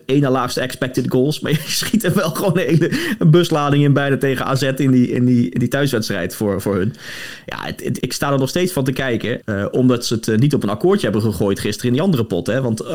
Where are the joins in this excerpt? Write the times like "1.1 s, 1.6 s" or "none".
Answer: 8.0 s, 9.4 s